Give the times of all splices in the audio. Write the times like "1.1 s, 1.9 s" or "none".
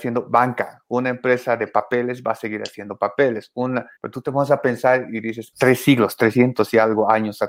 4.0 s, 5.5 s